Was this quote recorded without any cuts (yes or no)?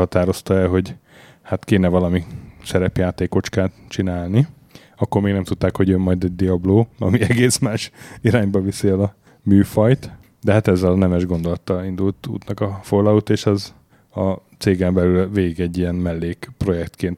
yes